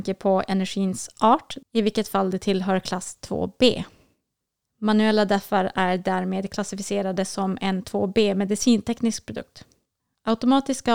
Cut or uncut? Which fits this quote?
cut